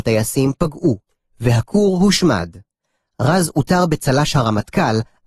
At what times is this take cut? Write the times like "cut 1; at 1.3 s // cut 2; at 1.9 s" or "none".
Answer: none